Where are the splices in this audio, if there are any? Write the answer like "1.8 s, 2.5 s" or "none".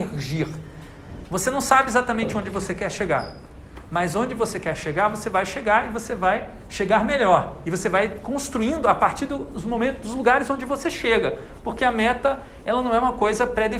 1.2 s